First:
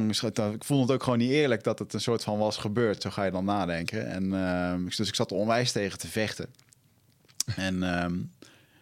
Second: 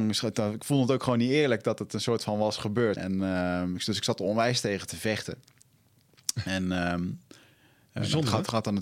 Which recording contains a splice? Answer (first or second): second